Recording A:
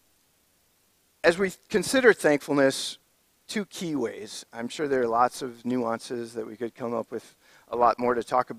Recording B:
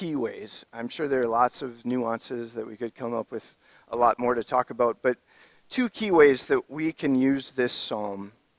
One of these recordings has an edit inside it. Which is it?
A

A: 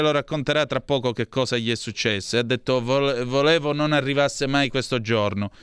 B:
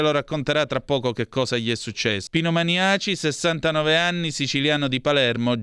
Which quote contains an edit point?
B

